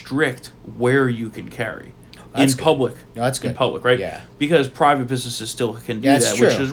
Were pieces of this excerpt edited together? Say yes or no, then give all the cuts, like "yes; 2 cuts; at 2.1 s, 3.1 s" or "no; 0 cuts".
no; 0 cuts